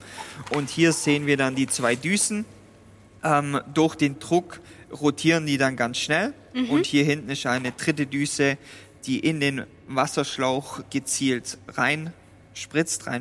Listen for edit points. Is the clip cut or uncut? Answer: uncut